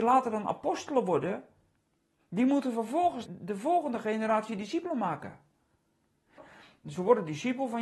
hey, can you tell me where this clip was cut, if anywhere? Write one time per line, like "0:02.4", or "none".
0:03.3
0:06.4